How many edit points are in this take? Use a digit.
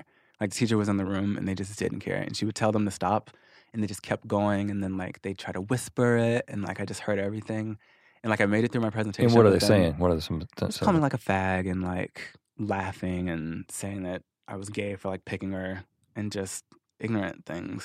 0